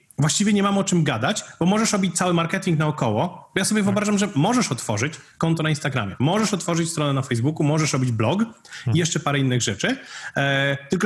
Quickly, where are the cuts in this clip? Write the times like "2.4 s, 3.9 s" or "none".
none